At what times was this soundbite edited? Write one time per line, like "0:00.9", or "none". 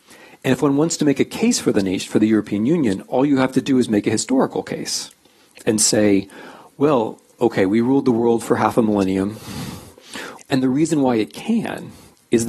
0:07.3
0:10.4